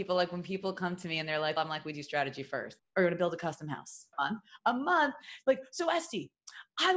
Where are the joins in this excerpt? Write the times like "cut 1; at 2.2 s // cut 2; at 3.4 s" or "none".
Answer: cut 1; at 1.6 s // cut 2; at 2.8 s // cut 3; at 4.1 s